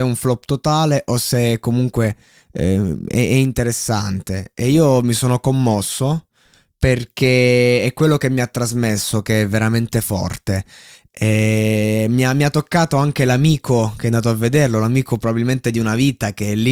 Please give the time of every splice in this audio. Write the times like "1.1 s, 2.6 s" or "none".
none